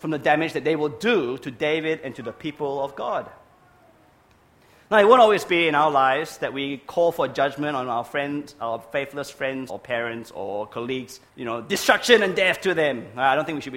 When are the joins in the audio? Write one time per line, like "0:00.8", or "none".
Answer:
0:09.7
0:11.3